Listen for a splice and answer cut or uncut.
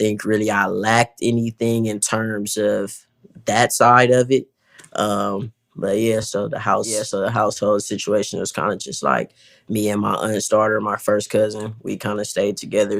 uncut